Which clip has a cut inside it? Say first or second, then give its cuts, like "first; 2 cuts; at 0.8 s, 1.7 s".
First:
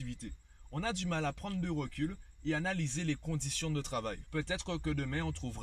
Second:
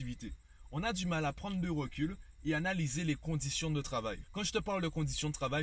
first; 1 cut; at 4.3 s